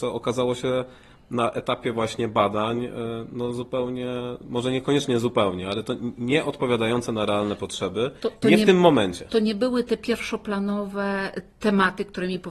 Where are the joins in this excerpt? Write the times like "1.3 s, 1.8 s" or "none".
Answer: none